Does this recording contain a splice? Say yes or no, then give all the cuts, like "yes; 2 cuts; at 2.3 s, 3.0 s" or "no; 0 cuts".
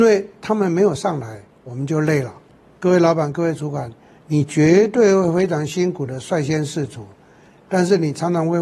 no; 0 cuts